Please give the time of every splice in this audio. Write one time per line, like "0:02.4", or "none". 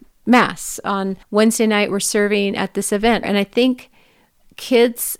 0:01.2
0:03.2